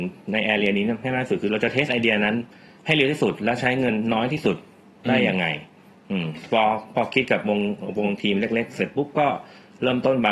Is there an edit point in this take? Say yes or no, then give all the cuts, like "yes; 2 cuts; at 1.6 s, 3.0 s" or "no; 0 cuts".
no; 0 cuts